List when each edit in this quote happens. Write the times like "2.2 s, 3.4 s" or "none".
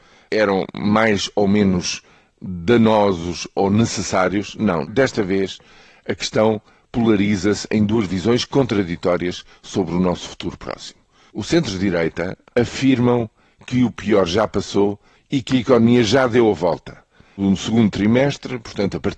12.5 s